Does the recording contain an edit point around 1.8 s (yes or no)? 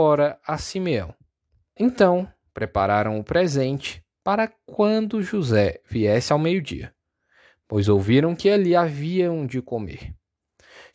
yes